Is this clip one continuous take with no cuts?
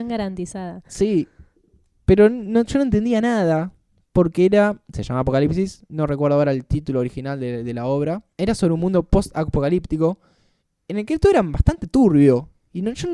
no; 1 cut; at 8.3 s

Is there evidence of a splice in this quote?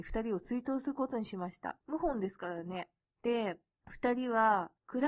yes; 1 cut; at 1.8 s

